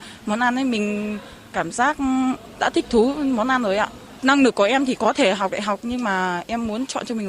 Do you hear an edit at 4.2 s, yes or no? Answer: yes